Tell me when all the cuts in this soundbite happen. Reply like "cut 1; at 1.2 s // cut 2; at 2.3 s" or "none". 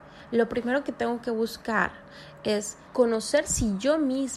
cut 1; at 2.9 s